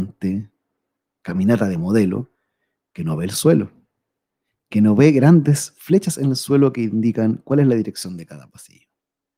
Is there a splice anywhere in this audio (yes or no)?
no